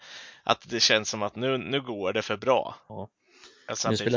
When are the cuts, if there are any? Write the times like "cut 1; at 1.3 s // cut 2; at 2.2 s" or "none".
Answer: cut 1; at 2.9 s